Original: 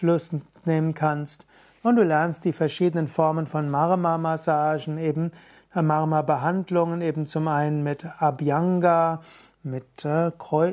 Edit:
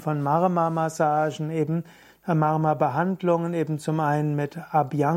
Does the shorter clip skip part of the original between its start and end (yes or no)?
no